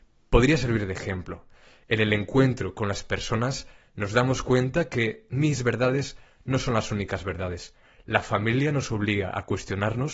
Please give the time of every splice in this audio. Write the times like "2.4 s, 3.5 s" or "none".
none